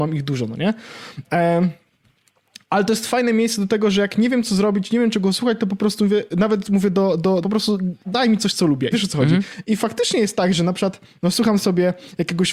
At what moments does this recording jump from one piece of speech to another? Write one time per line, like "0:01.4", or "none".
0:01.2
0:07.4
0:08.9